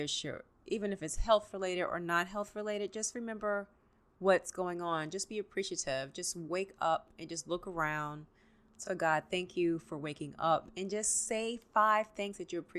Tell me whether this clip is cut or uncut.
uncut